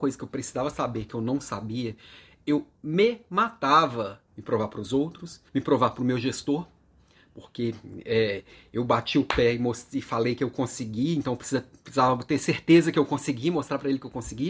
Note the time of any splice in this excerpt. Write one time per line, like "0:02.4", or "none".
0:04.3
0:05.5

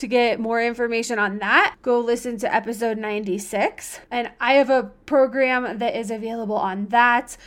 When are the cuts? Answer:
0:04.1

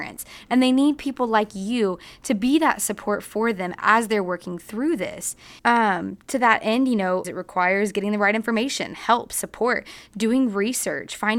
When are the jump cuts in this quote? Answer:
0:05.6
0:07.2

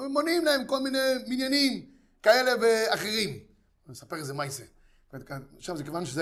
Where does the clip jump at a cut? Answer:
none

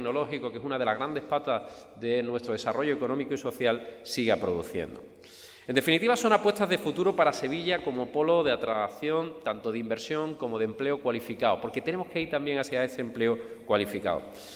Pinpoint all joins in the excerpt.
none

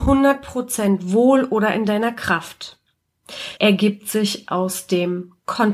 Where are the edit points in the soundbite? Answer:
0:03.6

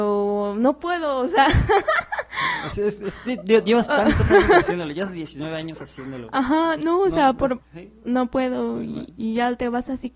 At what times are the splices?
0:07.6

